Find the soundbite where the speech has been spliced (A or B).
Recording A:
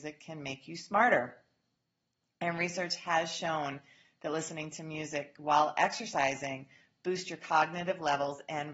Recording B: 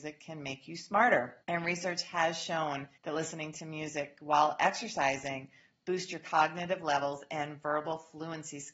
B